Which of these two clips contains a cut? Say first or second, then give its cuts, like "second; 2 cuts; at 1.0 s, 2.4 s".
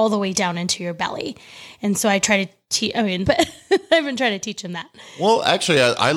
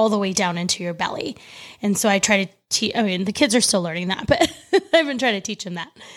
first; 1 cut; at 3.2 s